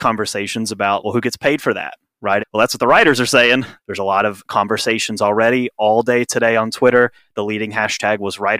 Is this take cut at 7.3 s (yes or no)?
no